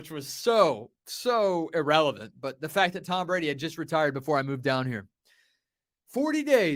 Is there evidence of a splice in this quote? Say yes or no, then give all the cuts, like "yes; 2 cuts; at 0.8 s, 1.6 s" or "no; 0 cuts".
no; 0 cuts